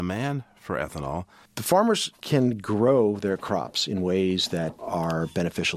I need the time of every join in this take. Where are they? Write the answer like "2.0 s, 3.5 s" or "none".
1.5 s